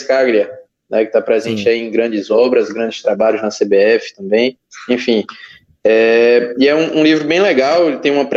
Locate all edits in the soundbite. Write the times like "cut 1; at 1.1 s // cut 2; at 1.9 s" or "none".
none